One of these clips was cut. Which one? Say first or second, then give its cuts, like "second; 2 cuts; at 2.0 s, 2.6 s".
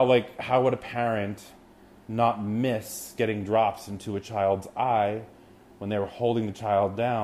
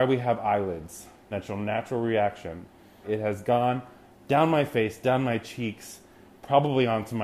second; 2 cuts; at 1.3 s, 3.0 s